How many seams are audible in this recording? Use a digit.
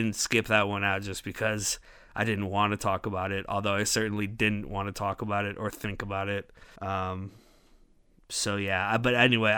1